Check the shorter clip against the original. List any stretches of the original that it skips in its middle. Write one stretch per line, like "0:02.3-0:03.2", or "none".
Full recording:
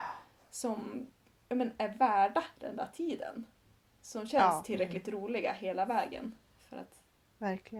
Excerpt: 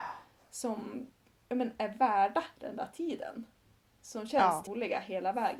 0:04.7-0:05.2